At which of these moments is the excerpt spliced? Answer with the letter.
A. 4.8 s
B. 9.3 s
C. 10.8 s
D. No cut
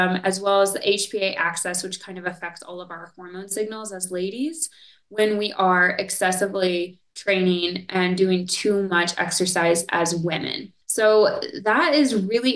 C